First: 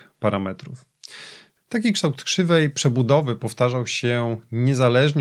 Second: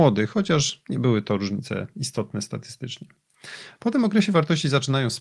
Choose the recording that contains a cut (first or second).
second